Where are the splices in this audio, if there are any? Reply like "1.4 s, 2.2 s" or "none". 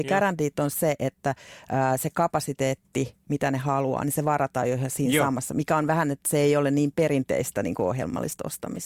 none

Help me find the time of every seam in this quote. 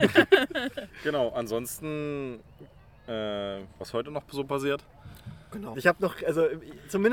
3.8 s, 5.7 s

